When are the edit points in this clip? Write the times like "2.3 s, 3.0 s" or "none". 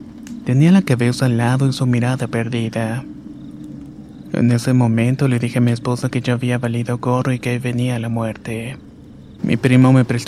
9.4 s